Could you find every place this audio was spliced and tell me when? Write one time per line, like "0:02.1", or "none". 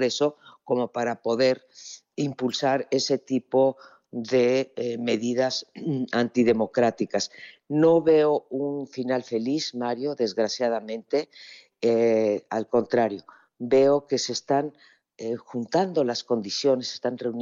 none